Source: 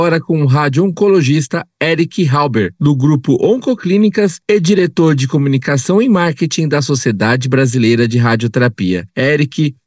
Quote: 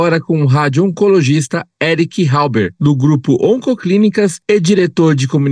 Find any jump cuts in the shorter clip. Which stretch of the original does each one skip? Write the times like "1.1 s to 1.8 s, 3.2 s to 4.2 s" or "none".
none